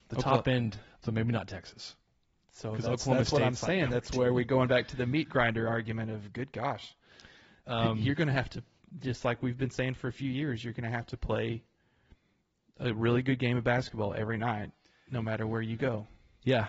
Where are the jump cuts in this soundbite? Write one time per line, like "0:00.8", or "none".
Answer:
0:01.0